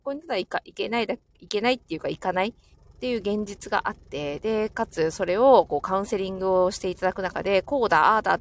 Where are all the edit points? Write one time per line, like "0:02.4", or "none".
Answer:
0:02.7